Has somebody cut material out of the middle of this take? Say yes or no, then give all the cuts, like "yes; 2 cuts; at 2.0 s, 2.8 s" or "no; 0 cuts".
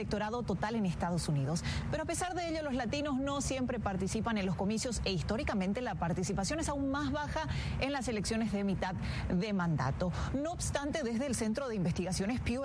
no; 0 cuts